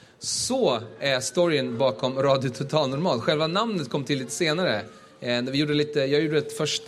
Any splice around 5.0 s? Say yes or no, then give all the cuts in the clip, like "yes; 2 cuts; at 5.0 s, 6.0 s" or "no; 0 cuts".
no; 0 cuts